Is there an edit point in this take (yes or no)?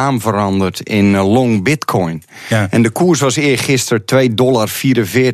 no